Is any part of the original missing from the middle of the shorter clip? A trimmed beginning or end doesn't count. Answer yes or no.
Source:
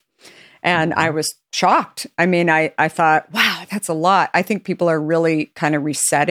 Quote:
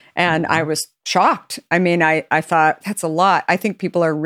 yes